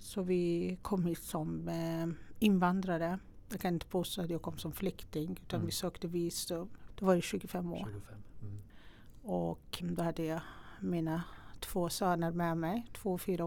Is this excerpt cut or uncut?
cut